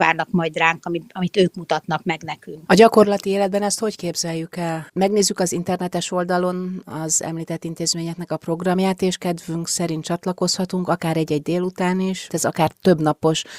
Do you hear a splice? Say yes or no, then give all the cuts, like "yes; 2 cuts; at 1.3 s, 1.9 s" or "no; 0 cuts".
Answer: yes; 3 cuts; at 2.7 s, 4.9 s, 12.3 s